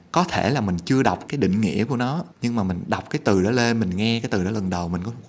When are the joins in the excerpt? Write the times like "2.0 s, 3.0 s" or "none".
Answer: 1.3 s, 2.3 s